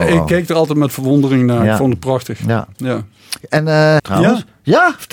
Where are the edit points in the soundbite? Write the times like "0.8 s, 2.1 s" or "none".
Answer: 4.0 s